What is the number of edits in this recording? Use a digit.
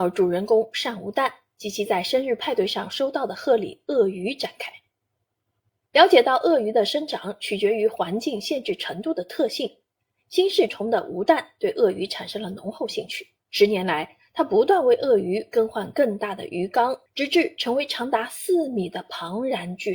3